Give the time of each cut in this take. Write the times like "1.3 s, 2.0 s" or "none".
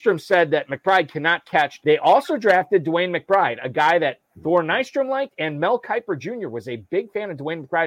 1.8 s